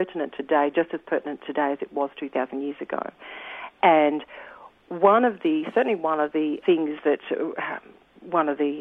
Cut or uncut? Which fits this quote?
cut